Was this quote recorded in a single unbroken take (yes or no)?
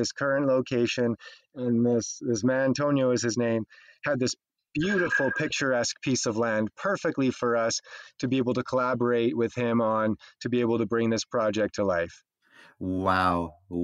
yes